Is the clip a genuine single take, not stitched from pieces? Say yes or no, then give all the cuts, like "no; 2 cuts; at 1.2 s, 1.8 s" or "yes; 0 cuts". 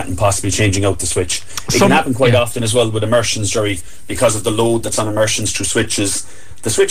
yes; 0 cuts